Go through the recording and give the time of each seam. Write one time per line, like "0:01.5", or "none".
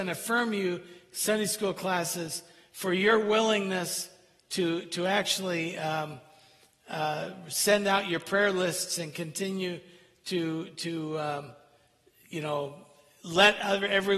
none